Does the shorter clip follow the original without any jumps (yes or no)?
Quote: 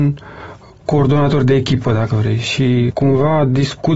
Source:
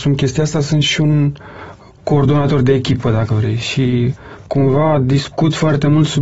no